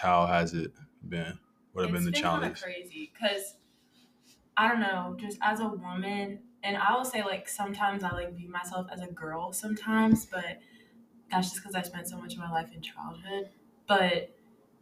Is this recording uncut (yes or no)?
yes